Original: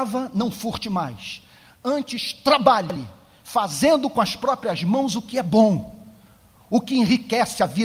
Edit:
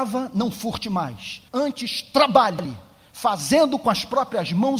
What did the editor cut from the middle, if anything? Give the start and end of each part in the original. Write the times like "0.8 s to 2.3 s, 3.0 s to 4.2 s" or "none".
1.5 s to 1.8 s